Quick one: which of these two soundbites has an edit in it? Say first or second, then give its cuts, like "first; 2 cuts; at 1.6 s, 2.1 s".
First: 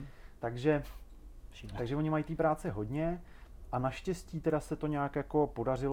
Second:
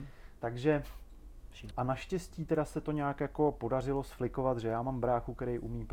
second; 1 cut; at 1.7 s